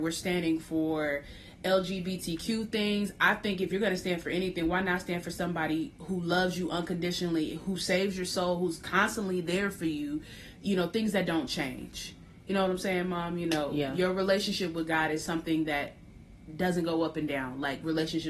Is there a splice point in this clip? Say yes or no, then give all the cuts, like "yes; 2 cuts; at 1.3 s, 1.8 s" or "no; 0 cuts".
no; 0 cuts